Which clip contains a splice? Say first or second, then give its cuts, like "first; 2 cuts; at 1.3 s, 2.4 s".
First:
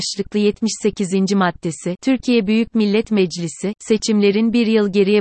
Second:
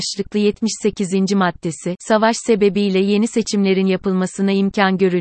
first; 1 cut; at 2.0 s